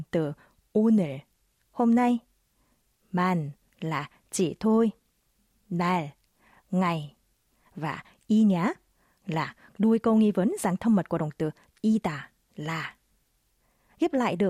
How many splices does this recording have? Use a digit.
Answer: 0